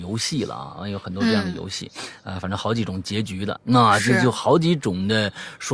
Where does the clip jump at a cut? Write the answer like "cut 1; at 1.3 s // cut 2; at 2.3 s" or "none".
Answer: cut 1; at 3.6 s